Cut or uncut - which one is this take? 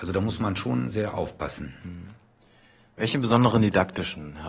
uncut